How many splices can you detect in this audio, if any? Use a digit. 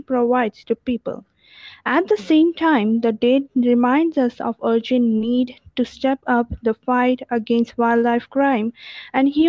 0